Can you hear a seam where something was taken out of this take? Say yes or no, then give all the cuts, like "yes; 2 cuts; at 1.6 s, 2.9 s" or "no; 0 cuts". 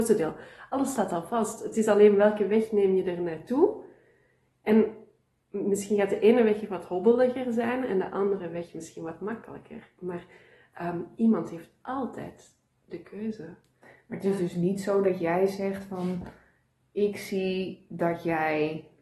no; 0 cuts